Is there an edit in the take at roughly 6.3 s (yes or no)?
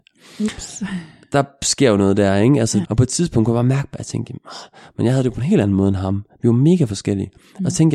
no